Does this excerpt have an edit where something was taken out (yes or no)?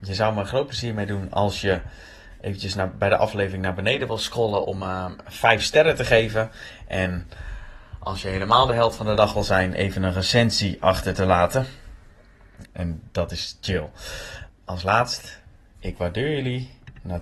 yes